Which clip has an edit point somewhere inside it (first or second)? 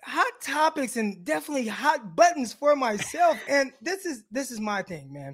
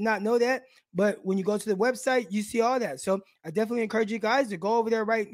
first